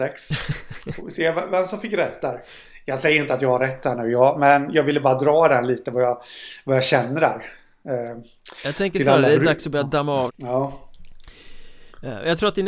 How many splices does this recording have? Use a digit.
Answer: 1